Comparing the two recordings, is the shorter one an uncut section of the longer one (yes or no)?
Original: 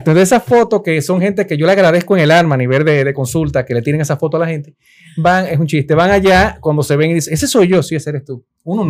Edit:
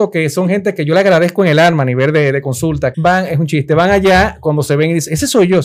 no